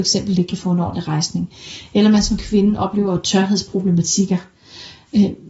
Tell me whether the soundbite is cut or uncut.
uncut